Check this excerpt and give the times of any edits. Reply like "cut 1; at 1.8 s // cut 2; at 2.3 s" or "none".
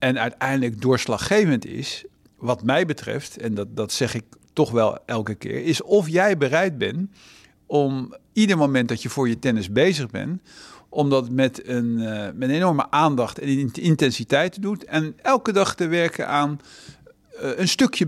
none